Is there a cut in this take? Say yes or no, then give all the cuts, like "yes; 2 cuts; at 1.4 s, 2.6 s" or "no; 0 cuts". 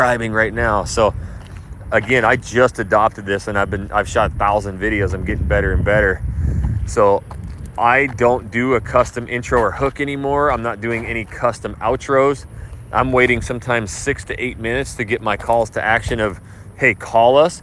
no; 0 cuts